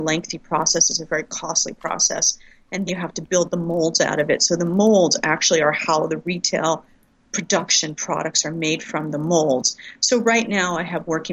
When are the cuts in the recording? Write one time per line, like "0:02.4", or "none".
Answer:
0:02.9